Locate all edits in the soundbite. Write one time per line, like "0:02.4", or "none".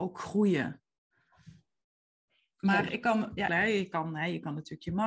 0:03.5